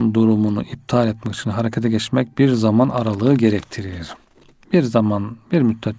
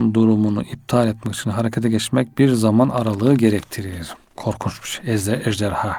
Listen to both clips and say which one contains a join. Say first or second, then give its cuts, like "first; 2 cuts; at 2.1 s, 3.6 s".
second; 1 cut; at 4.4 s